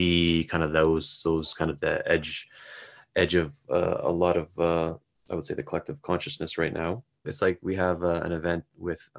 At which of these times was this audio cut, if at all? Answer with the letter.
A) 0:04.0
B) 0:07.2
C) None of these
B